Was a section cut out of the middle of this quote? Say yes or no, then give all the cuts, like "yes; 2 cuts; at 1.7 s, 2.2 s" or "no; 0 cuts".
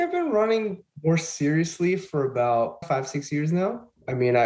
yes; 1 cut; at 2.8 s